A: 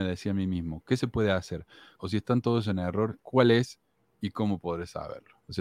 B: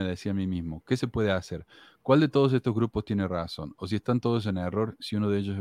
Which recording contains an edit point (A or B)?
A